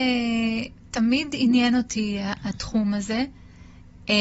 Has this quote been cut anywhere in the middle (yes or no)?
no